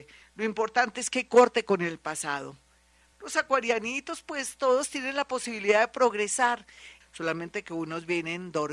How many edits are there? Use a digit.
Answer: 2